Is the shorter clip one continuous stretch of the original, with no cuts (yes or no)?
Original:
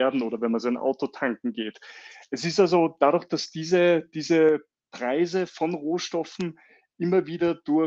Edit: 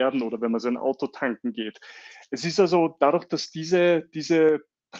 yes